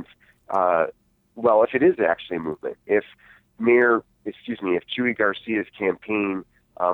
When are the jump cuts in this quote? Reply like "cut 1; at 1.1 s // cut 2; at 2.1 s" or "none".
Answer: none